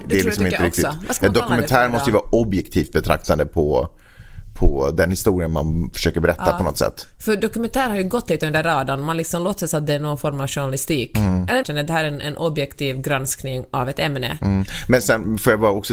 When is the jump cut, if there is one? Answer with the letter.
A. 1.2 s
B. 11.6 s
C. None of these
B